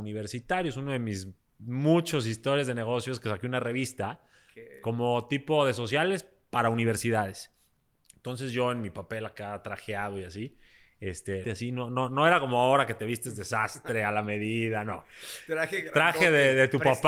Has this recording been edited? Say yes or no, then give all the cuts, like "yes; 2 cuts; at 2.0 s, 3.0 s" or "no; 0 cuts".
yes; 1 cut; at 11.4 s